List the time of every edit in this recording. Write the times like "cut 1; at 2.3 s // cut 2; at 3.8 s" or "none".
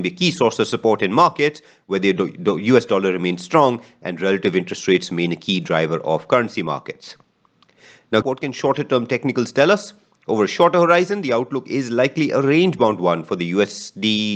cut 1; at 8.2 s